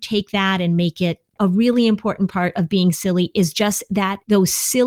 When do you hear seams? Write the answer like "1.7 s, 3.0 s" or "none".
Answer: none